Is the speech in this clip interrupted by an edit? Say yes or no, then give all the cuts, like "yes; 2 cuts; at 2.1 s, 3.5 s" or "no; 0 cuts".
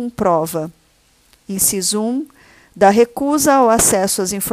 no; 0 cuts